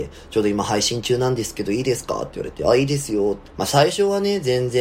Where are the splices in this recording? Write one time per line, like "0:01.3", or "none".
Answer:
0:03.4